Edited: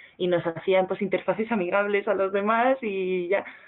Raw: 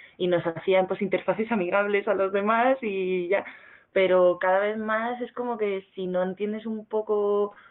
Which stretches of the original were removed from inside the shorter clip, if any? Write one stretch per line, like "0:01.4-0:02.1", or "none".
none